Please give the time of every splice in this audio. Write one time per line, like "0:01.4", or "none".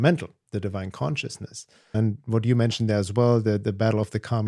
0:01.9